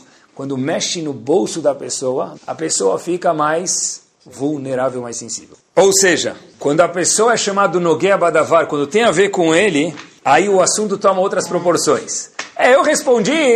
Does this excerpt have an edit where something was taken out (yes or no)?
yes